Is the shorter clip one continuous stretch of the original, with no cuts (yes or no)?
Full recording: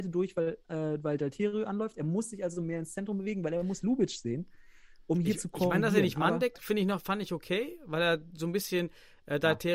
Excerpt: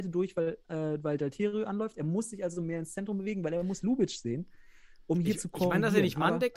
yes